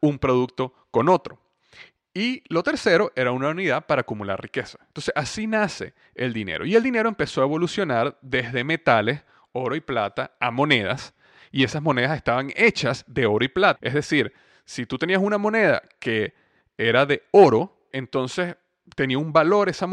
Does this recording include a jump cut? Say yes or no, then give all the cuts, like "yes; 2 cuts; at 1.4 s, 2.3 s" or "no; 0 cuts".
yes; 2 cuts; at 13.8 s, 17.9 s